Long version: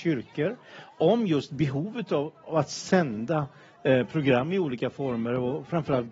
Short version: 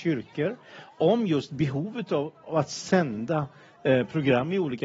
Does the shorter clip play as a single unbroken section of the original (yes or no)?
yes